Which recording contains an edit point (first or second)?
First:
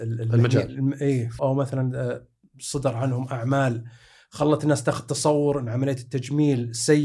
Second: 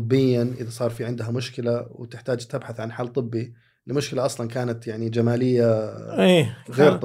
first